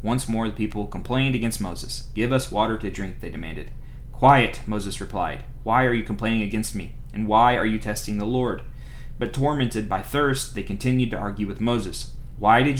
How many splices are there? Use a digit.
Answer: 0